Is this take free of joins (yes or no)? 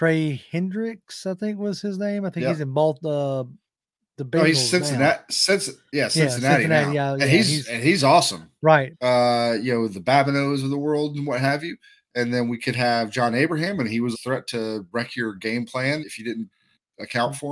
no